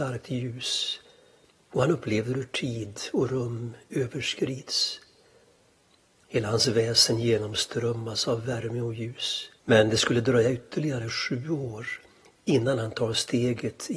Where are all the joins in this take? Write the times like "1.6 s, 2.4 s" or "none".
9.6 s